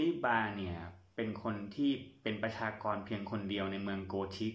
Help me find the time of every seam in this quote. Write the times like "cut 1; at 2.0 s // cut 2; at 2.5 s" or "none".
none